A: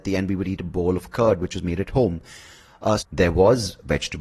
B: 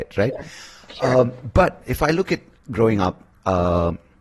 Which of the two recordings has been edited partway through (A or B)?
A